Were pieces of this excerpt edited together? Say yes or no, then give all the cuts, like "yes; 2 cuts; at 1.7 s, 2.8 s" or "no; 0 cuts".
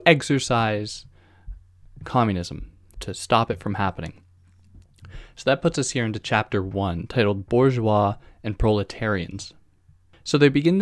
yes; 1 cut; at 2.9 s